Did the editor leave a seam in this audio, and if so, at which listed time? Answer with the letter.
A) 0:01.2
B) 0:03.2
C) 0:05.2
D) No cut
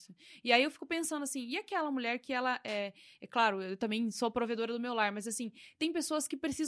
D